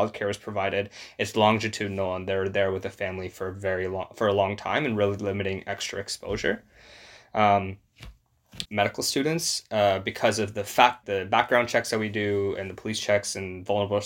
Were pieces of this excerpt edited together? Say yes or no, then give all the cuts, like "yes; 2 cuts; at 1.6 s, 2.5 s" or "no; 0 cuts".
yes; 2 cuts; at 8.7 s, 11.0 s